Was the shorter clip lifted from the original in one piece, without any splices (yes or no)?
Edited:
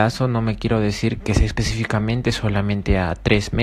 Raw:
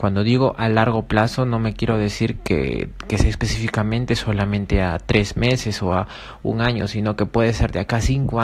no